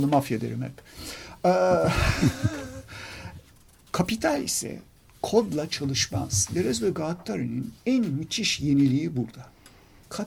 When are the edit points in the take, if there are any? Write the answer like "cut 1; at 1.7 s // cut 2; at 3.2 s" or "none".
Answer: cut 1; at 3.4 s